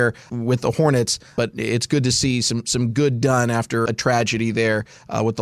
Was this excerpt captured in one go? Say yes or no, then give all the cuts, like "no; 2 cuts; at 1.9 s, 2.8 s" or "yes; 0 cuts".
no; 1 cut; at 3.9 s